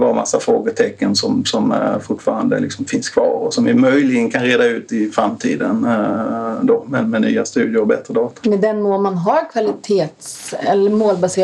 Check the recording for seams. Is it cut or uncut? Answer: uncut